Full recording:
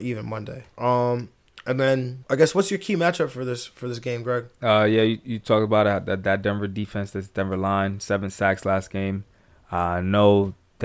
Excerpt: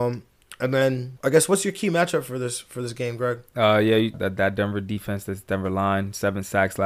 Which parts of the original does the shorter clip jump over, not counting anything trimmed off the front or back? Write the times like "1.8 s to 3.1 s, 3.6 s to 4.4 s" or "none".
5.2 s to 6.0 s